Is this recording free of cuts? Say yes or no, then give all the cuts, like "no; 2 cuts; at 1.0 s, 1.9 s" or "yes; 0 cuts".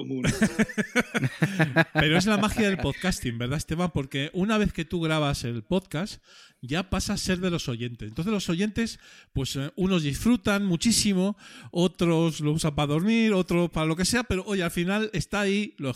yes; 0 cuts